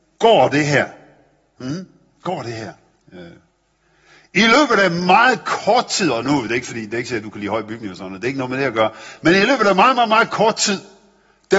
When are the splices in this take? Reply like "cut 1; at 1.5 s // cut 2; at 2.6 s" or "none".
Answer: cut 1; at 3.0 s